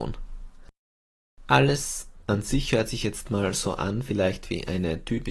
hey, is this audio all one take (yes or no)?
yes